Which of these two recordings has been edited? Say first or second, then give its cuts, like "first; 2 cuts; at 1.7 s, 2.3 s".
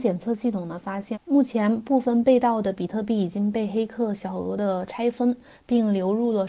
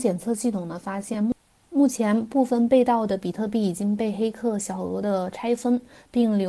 first; 1 cut; at 1.1 s